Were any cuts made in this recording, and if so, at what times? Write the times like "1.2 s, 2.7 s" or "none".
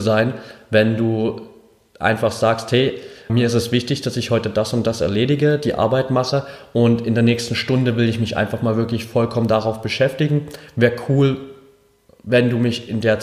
3.3 s